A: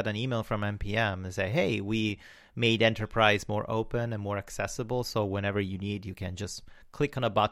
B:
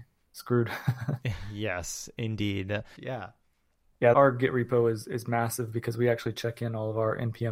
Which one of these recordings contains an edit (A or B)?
B